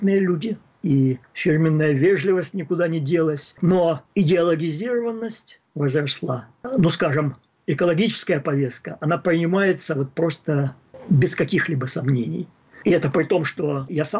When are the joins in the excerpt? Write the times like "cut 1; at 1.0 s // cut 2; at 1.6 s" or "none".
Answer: none

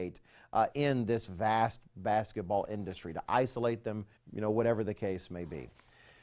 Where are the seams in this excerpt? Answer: cut 1; at 4.2 s

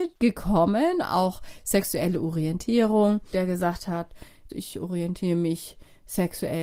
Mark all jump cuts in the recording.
cut 1; at 3.3 s // cut 2; at 4.5 s

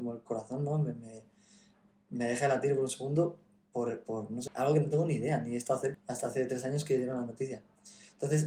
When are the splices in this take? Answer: cut 1; at 4.5 s // cut 2; at 5.9 s

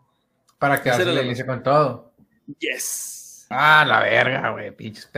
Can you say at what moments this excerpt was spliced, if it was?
cut 1; at 3.5 s

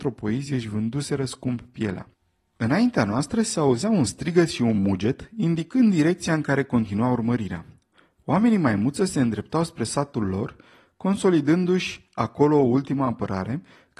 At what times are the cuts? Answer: none

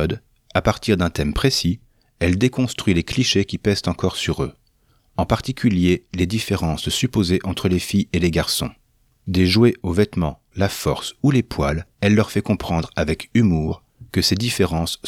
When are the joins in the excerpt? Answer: cut 1; at 10.5 s // cut 2; at 11.9 s

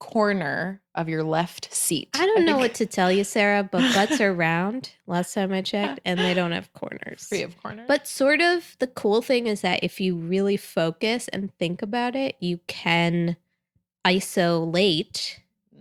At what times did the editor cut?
none

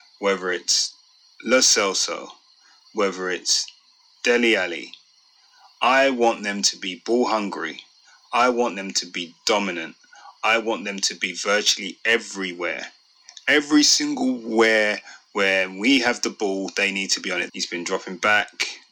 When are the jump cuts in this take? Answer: cut 1; at 10.4 s // cut 2; at 17.5 s

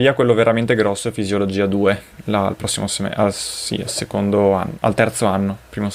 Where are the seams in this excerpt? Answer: none

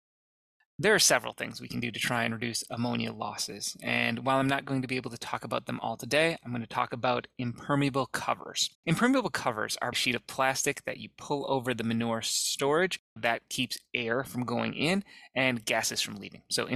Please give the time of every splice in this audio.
cut 1; at 8.7 s // cut 2; at 9.9 s // cut 3; at 13.2 s

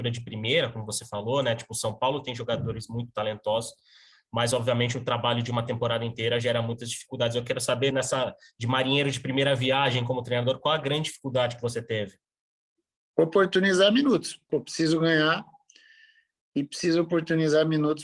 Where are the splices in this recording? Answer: cut 1; at 7.9 s // cut 2; at 14.5 s

